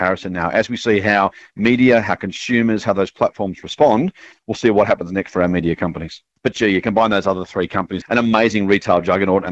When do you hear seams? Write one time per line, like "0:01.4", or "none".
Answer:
0:06.4
0:08.0